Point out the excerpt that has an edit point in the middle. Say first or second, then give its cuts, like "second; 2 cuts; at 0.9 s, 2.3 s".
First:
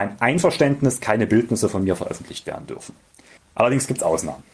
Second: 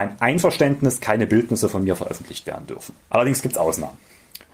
second; 1 cut; at 3.0 s